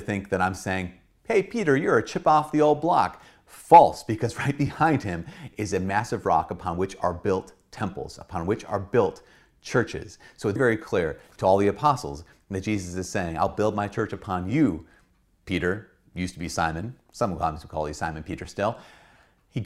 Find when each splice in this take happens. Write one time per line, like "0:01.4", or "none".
0:10.6